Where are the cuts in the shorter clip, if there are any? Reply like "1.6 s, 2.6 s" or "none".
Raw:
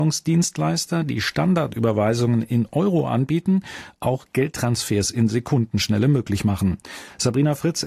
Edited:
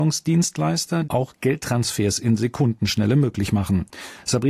1.0 s